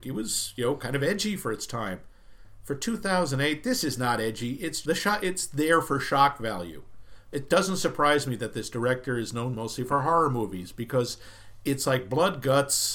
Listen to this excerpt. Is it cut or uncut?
cut